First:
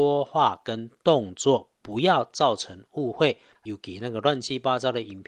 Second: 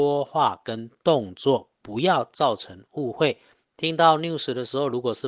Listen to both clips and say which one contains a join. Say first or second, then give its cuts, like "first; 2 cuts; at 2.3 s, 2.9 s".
first; 1 cut; at 3.5 s